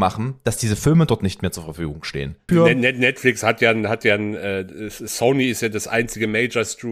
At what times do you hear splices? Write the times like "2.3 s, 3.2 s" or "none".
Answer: 2.5 s